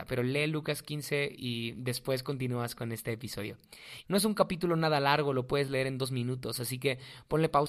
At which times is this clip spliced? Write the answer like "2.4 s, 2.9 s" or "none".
1.4 s, 4.0 s